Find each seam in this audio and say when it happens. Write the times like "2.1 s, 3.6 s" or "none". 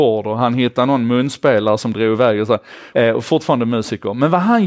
2.9 s